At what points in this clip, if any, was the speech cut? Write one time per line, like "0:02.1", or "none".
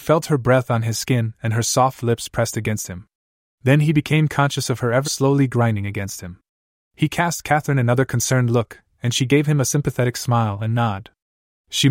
0:05.0